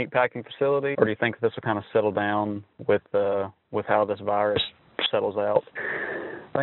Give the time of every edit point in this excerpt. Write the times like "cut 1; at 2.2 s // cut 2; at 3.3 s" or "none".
cut 1; at 0.9 s